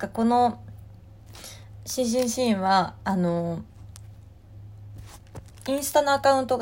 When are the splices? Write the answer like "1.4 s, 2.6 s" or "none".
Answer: none